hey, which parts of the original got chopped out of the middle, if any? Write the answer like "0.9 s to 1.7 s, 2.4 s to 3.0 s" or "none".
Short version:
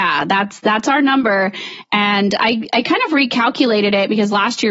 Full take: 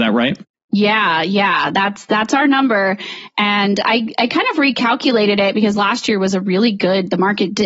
none